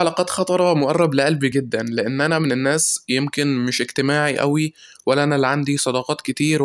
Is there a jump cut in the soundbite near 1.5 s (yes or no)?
yes